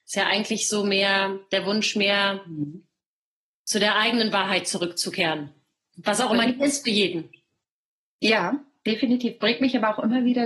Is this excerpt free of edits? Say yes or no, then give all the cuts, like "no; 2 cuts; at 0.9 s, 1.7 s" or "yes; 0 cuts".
yes; 0 cuts